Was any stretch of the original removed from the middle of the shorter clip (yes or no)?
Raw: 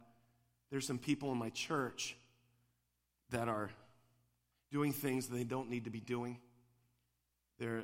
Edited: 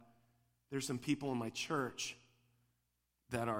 no